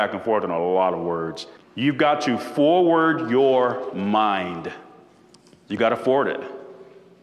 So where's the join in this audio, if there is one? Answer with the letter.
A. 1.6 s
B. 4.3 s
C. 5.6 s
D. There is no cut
A